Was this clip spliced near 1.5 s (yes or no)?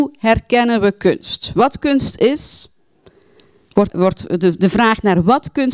no